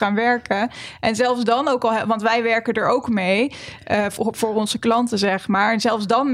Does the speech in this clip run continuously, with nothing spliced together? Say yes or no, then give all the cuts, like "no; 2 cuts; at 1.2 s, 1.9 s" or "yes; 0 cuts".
yes; 0 cuts